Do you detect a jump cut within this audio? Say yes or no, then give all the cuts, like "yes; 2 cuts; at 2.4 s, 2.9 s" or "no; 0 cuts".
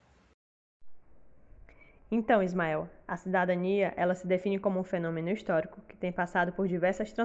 no; 0 cuts